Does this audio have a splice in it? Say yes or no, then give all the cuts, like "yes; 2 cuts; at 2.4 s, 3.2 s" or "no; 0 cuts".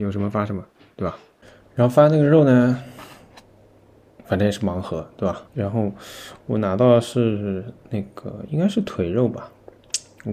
yes; 1 cut; at 5.5 s